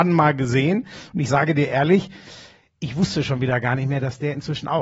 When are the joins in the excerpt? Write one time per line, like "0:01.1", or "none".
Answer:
none